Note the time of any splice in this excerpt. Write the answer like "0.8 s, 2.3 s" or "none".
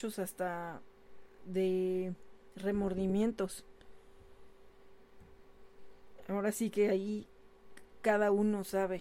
none